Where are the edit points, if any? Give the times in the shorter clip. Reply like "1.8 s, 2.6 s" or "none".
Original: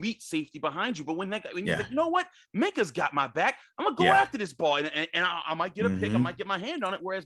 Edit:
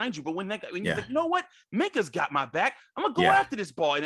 none